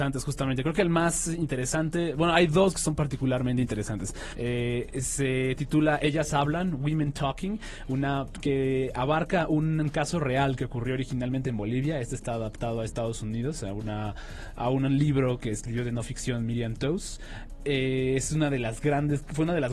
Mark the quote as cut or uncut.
cut